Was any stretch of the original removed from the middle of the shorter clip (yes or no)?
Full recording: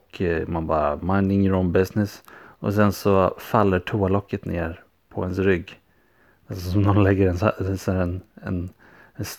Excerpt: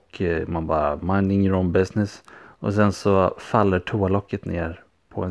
no